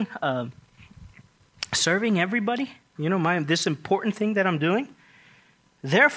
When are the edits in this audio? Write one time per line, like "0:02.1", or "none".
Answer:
0:03.0